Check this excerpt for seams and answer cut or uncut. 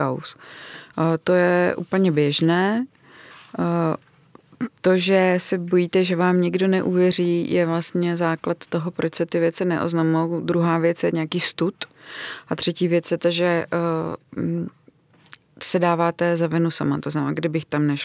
uncut